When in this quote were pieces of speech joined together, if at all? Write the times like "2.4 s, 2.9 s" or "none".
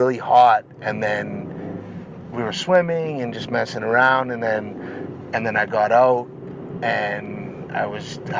none